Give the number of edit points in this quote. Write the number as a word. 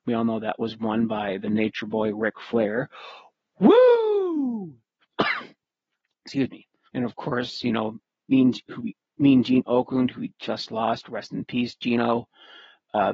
one